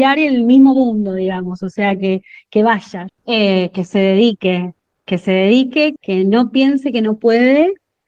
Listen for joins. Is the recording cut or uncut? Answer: cut